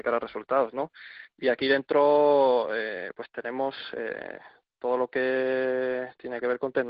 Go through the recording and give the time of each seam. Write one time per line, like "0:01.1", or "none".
none